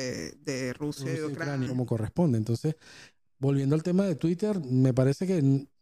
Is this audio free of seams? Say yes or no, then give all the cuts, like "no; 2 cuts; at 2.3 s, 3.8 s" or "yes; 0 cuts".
no; 1 cut; at 1.7 s